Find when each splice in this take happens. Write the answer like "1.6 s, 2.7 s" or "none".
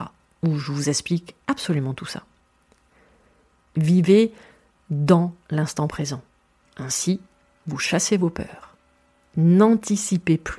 6.6 s